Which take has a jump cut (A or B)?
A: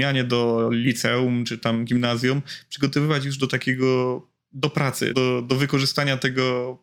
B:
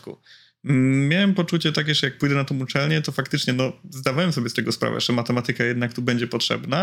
A